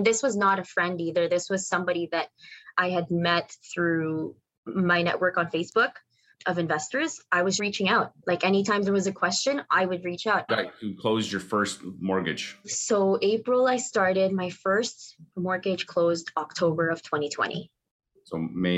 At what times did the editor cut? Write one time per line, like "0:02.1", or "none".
0:07.6
0:10.5

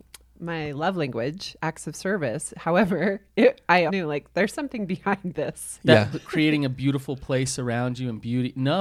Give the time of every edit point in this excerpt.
0:03.9
0:06.1

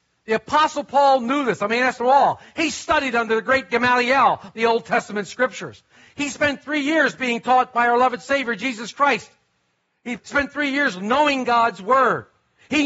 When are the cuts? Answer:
none

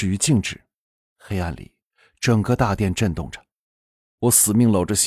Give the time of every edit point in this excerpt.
0:01.0

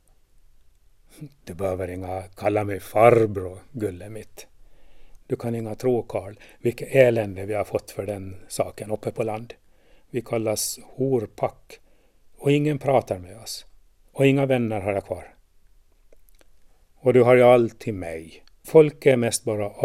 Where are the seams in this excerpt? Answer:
0:05.2
0:16.9
0:18.6

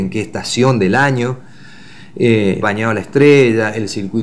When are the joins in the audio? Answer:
0:02.6

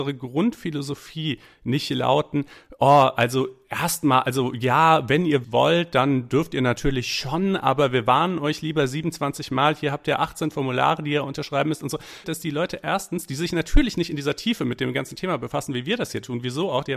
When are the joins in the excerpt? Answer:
0:05.4
0:12.2

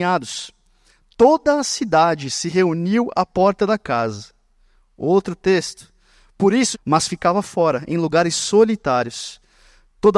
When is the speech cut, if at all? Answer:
0:06.7

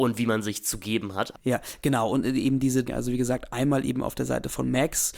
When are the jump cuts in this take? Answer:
0:01.3
0:02.8

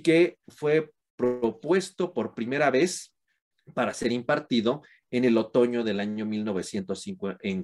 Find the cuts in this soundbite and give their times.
none

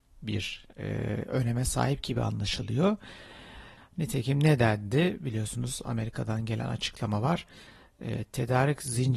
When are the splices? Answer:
0:03.8

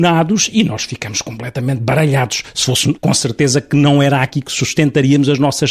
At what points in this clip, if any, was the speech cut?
0:03.0

